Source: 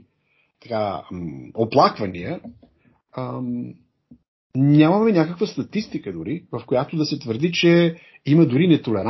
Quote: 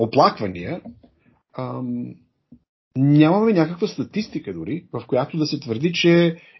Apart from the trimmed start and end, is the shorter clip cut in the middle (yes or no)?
no